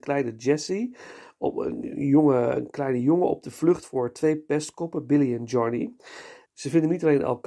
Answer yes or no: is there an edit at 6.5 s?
yes